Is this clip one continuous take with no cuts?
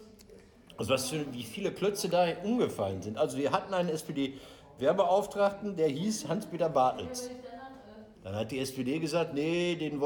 no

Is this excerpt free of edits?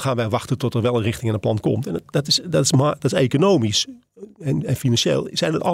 no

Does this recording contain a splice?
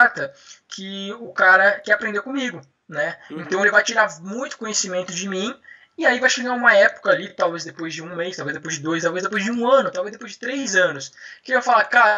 no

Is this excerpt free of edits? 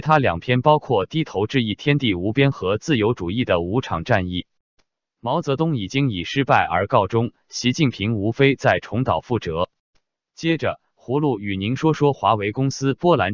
no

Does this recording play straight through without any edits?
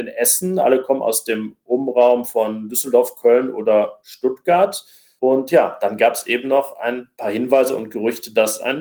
yes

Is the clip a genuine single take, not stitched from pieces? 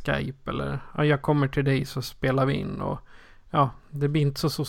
yes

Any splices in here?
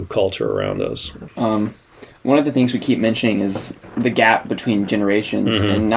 yes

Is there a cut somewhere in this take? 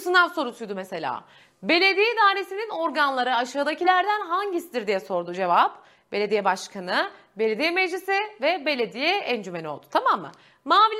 no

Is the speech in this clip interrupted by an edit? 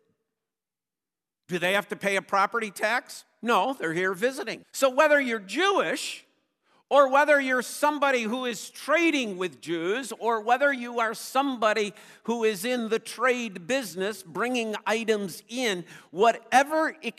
yes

